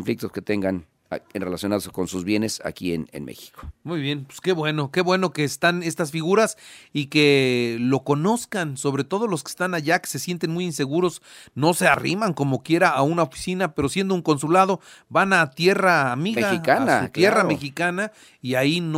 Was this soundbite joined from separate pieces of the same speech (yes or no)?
no